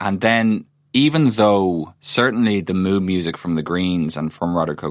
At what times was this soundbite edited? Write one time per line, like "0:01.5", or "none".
0:02.0